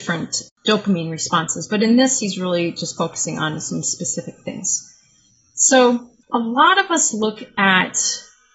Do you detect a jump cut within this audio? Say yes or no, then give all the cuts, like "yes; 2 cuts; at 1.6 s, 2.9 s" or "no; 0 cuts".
no; 0 cuts